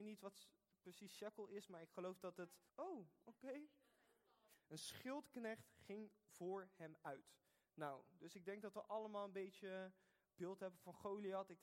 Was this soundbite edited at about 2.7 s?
yes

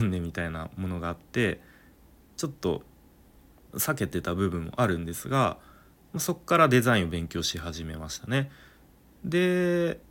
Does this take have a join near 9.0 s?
no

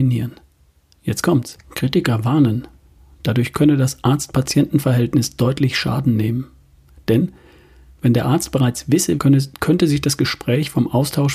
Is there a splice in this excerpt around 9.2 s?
yes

